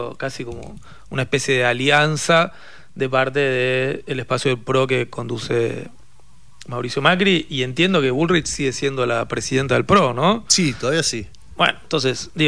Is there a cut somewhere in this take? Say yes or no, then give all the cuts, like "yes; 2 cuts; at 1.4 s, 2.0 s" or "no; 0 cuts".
no; 0 cuts